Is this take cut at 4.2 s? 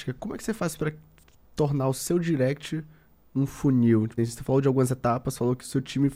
yes; 1 cut; at 4.2 s

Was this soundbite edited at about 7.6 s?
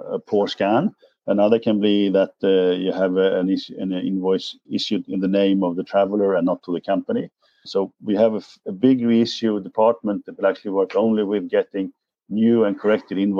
yes; 2 cuts; at 4.6 s, 7.6 s

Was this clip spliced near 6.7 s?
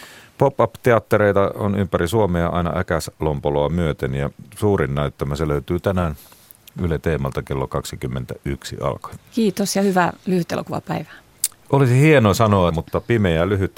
no; 2 cuts; at 9.2 s, 12.7 s

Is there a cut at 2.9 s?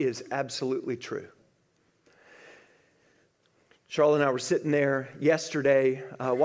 no; 0 cuts

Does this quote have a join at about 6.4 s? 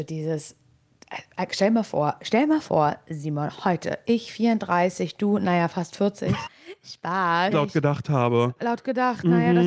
yes; 2 cuts; at 6.4 s, 7.5 s

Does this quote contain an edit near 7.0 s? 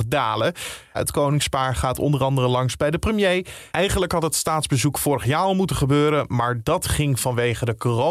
no; 2 cuts; at 0.9 s, 3.7 s

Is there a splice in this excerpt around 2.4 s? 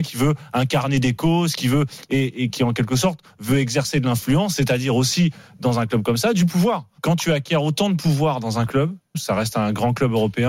no; 2 cuts; at 7.0 s, 9.1 s

